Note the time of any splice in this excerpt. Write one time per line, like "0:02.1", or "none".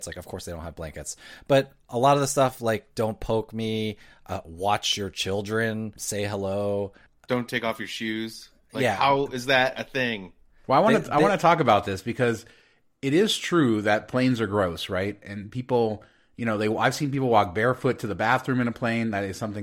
none